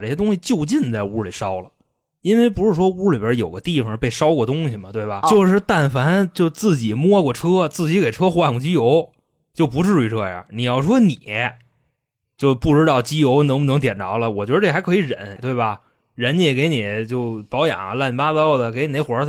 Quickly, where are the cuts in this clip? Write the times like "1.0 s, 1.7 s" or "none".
5.2 s, 15.4 s